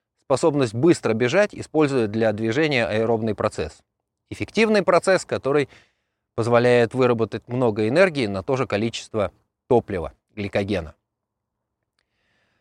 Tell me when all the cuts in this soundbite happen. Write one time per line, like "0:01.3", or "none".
none